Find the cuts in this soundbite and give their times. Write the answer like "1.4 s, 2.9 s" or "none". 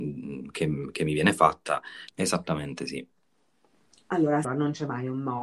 2.1 s, 4.4 s